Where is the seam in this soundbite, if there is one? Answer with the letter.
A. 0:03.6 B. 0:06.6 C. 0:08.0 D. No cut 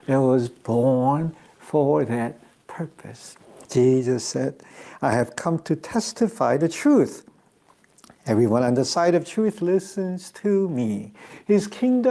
A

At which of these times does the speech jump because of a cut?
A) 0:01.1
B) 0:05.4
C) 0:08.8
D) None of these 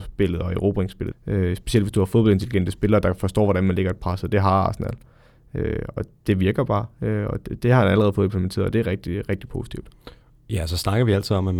A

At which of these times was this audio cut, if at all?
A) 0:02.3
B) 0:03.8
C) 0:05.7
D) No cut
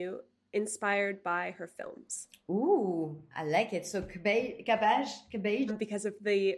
C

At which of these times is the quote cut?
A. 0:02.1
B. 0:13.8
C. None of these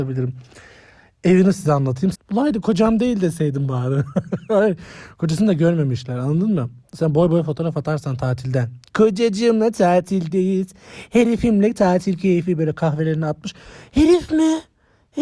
A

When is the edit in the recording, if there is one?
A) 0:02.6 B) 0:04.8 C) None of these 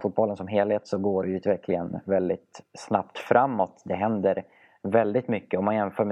C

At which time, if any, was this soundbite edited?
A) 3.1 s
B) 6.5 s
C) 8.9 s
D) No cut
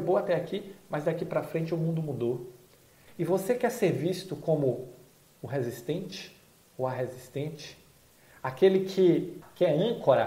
A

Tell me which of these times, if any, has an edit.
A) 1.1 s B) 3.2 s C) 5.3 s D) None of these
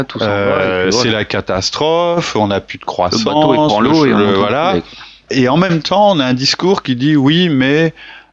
C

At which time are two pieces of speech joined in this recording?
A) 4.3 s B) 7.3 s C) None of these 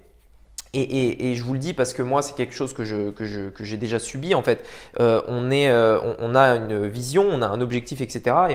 C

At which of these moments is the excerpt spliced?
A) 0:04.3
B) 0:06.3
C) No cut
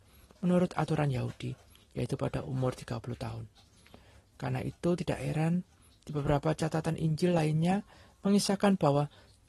A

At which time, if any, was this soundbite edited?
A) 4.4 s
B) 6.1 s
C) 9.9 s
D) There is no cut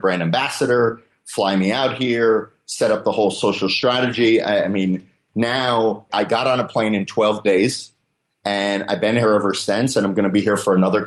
B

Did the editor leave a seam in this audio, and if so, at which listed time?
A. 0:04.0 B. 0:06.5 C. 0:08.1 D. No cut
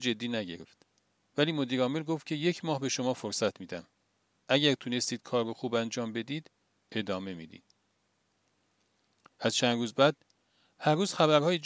D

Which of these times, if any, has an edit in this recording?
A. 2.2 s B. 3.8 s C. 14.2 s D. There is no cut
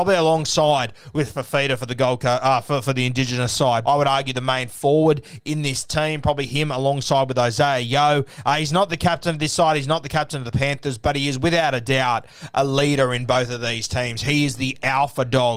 B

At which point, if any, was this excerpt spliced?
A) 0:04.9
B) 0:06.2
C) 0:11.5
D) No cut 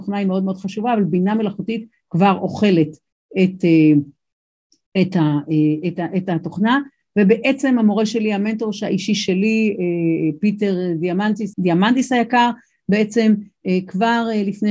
C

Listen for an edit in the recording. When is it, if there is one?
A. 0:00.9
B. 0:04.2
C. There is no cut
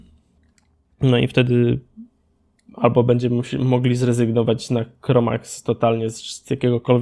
C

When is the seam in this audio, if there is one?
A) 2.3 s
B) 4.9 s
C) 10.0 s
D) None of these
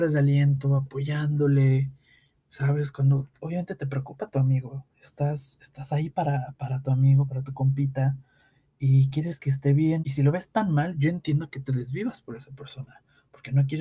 C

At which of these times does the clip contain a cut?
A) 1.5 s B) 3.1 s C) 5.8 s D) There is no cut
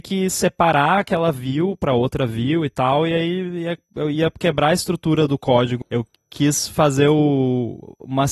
C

